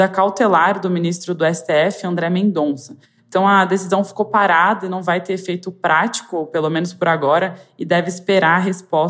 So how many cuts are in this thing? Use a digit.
0